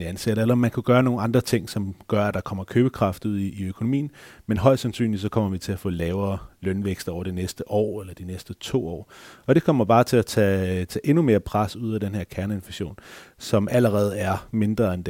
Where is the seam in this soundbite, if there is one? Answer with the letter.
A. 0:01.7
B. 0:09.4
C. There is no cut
C